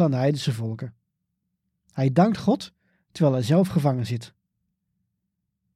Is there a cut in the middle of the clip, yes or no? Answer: no